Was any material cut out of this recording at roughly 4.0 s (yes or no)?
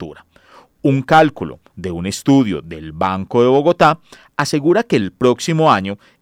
no